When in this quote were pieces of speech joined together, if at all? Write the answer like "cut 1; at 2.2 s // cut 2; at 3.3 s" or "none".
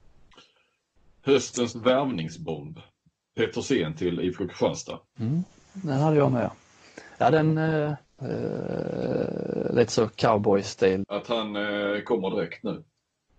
cut 1; at 5.1 s // cut 2; at 8.2 s // cut 3; at 11.0 s